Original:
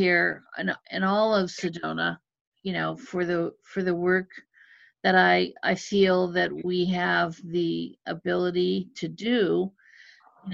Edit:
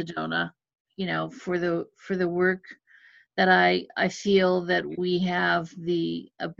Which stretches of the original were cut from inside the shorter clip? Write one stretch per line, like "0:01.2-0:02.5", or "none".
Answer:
none